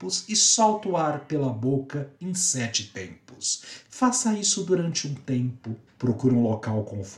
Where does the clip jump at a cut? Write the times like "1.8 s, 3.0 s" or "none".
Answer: 3.8 s, 5.9 s